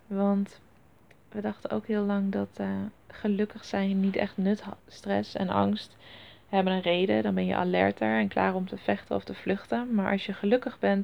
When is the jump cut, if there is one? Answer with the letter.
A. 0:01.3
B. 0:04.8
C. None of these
B